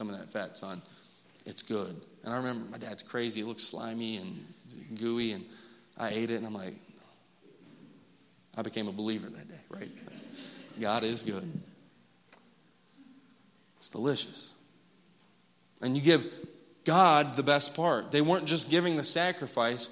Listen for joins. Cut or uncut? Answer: uncut